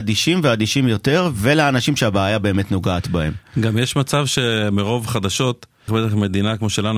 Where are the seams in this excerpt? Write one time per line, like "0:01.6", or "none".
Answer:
0:05.9